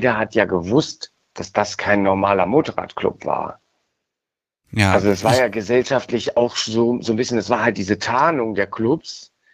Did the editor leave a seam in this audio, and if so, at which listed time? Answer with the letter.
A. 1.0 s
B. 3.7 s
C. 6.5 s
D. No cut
D